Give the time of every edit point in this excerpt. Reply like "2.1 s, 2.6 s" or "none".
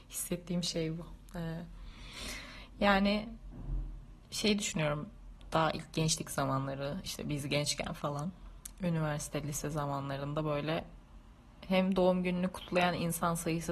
none